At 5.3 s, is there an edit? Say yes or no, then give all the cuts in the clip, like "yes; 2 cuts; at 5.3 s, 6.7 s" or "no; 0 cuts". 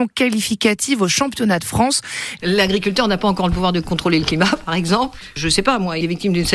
no; 1 cut; at 2.4 s